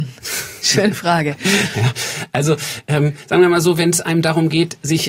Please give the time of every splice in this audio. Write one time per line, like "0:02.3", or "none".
none